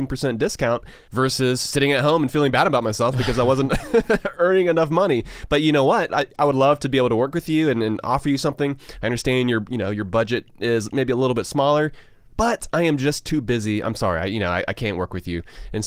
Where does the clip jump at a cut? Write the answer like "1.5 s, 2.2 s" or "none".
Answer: 6.1 s